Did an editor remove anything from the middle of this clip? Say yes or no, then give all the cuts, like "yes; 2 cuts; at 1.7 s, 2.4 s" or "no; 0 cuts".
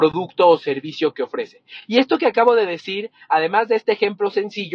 no; 0 cuts